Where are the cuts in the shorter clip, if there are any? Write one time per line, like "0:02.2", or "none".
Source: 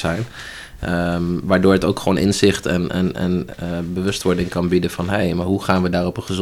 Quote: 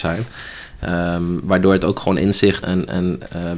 0:02.6